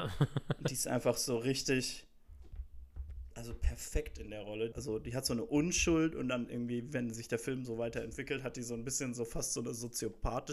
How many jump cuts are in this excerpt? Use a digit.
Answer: 1